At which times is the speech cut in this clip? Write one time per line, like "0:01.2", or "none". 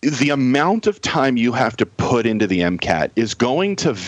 none